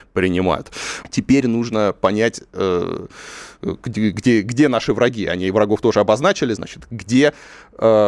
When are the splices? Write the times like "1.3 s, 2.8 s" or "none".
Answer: 1.0 s, 6.6 s

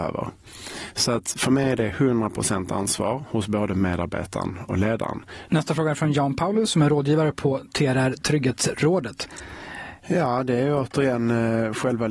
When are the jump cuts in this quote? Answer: 5.5 s, 10.0 s

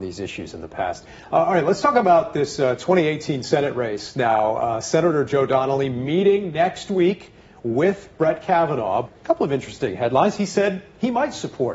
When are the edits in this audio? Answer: 9.0 s

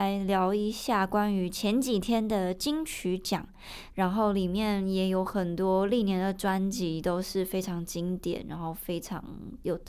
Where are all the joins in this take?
3.9 s

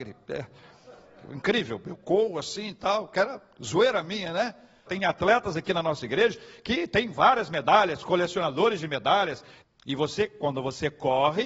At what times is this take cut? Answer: 4.9 s, 9.6 s

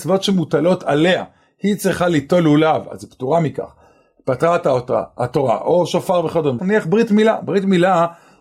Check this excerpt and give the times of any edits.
6.6 s

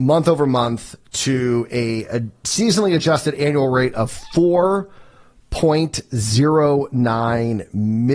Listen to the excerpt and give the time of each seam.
none

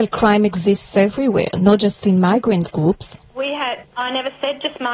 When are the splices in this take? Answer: none

